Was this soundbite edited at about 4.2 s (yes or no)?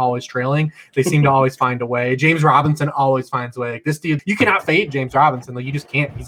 yes